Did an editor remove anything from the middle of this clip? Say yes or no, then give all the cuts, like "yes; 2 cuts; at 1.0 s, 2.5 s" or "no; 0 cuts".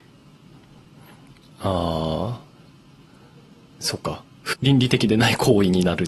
yes; 1 cut; at 4.5 s